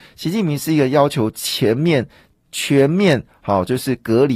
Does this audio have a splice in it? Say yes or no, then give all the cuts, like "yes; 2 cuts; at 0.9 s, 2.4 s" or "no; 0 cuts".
no; 0 cuts